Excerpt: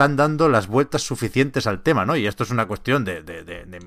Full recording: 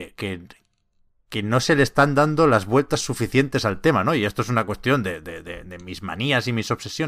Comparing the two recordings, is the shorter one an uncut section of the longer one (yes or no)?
yes